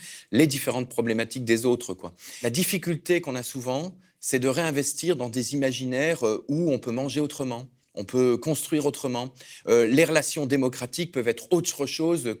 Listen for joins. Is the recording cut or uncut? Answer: uncut